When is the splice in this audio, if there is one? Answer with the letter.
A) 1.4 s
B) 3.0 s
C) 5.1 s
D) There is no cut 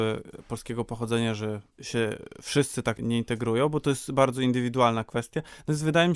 B